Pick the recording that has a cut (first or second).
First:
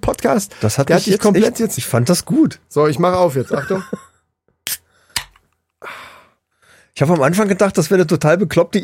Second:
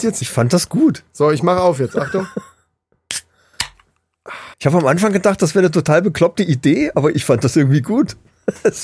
second